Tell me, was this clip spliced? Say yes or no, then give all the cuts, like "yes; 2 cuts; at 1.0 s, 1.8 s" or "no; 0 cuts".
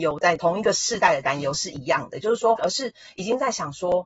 yes; 1 cut; at 2.6 s